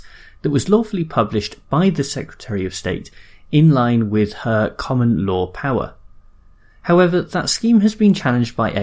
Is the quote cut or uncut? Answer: uncut